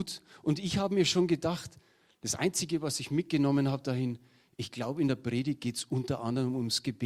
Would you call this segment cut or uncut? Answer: uncut